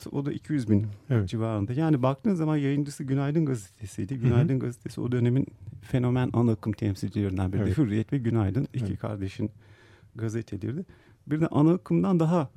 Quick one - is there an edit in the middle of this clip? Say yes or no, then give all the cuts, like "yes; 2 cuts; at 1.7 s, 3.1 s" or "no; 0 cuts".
no; 0 cuts